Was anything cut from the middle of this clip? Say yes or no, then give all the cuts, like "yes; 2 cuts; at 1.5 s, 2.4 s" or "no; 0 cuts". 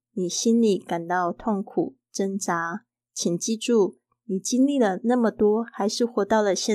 no; 0 cuts